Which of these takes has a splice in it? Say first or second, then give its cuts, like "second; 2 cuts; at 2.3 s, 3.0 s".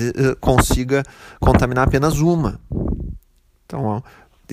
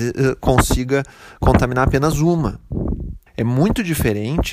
second; 1 cut; at 3.3 s